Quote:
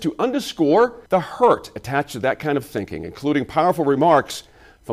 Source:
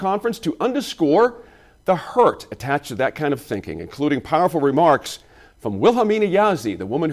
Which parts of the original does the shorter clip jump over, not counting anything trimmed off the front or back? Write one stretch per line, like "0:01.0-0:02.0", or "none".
0:01.5-0:01.8